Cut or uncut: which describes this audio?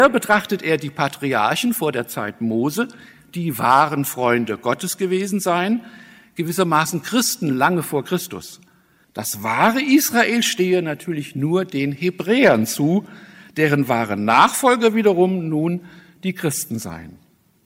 cut